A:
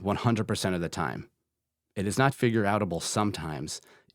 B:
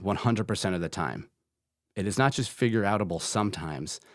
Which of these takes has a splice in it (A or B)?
A